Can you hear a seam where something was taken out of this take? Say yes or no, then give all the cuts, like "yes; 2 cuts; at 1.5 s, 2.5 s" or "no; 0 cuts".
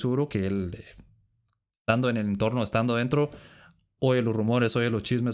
no; 0 cuts